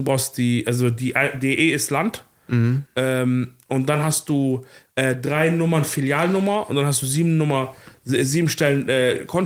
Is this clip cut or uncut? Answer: uncut